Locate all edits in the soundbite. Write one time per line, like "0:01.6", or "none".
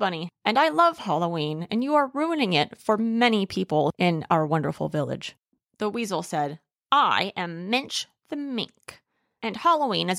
none